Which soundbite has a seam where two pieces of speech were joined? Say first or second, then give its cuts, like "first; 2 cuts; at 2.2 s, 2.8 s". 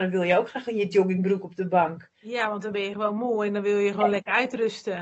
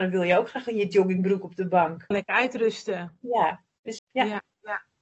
second; 2 cuts; at 2.1 s, 4.0 s